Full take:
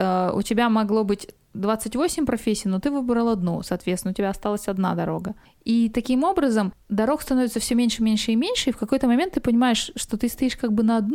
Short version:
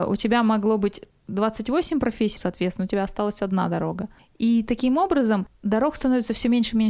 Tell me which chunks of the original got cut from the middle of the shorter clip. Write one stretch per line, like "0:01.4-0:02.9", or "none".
0:02.6-0:03.6